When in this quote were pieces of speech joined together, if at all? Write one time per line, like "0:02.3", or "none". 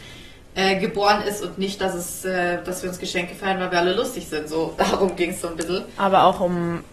none